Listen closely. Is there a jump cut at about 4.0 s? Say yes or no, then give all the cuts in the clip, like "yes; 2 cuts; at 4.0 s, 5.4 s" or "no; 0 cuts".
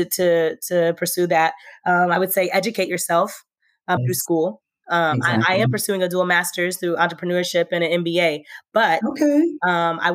yes; 1 cut; at 4.0 s